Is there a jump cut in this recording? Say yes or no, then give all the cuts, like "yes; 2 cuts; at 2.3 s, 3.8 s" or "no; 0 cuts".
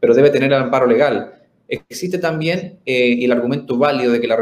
no; 0 cuts